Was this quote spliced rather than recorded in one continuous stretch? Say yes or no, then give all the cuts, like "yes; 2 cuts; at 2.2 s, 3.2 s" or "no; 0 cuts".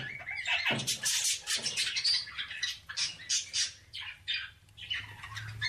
no; 0 cuts